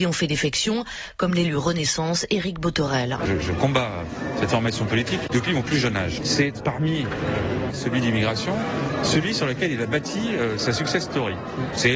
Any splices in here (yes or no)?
yes